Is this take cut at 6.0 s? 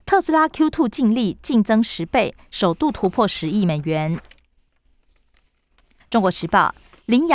yes; 1 cut; at 6.0 s

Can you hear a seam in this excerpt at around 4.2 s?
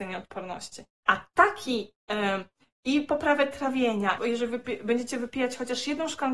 yes; 2 cuts; at 1.0 s, 4.2 s

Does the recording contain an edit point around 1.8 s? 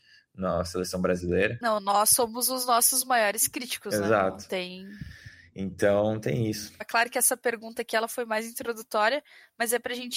no; 1 cut; at 6.8 s

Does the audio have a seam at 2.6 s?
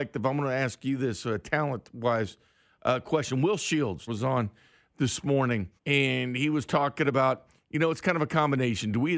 no; 2 cuts; at 4.1 s, 5.8 s

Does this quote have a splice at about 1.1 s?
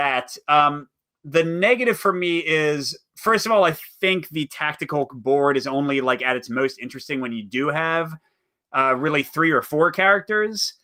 no; 0 cuts

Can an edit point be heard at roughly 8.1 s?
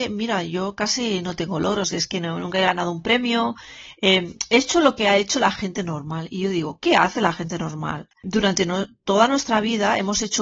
yes; 1 cut; at 8.1 s

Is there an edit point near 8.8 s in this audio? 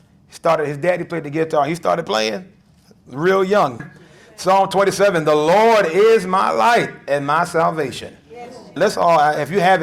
yes; 2 cuts; at 3.8 s, 8.8 s

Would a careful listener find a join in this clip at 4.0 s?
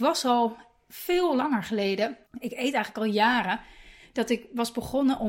no; 1 cut; at 2.3 s

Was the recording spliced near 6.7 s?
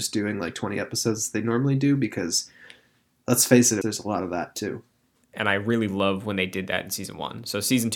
no; 2 cuts; at 3.8 s, 5.2 s

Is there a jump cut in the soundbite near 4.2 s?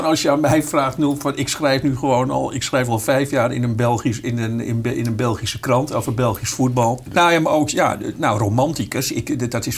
no; 1 cut; at 7.1 s

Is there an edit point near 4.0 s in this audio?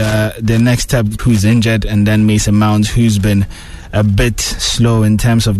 no; 1 cut; at 1.2 s

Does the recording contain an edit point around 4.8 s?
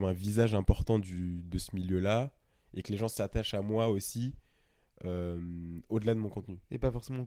no; 0 cuts

